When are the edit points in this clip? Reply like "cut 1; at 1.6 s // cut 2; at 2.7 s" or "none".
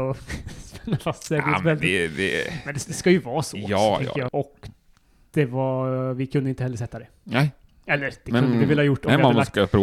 cut 1; at 4.3 s